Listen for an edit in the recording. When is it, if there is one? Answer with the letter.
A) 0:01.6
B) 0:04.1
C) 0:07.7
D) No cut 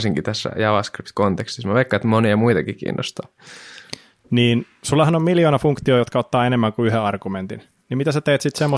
B